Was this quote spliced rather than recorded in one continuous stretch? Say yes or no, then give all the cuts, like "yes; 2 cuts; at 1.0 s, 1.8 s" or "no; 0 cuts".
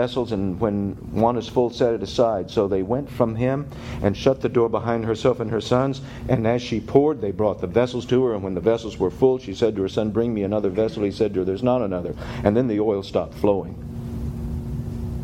no; 0 cuts